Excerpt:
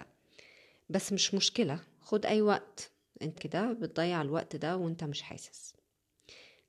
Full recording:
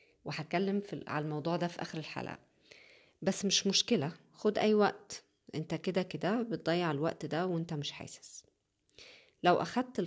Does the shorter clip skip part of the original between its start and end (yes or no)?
yes